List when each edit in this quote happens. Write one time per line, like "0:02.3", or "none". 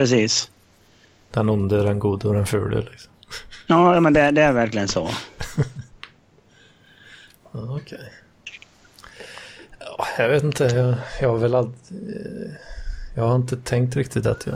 none